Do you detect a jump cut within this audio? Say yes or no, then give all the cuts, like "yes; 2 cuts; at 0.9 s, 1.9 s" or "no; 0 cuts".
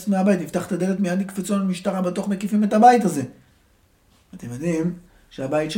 no; 0 cuts